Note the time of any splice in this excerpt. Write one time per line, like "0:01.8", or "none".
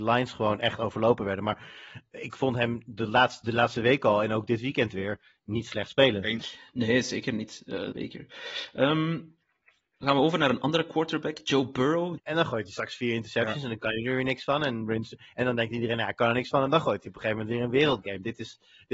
0:07.9
0:12.2